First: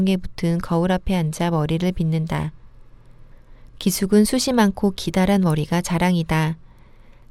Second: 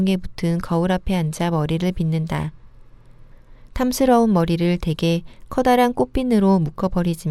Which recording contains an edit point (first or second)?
second